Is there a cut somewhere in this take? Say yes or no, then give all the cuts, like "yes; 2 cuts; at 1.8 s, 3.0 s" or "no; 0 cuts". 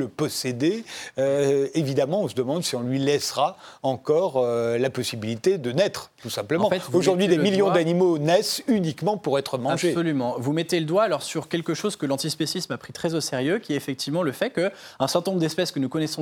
no; 0 cuts